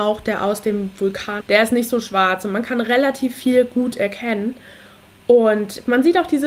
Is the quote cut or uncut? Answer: cut